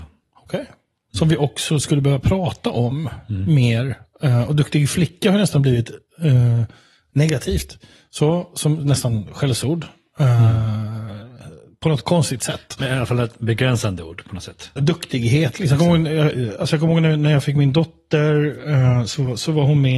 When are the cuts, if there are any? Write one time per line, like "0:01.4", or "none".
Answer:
0:01.1
0:14.8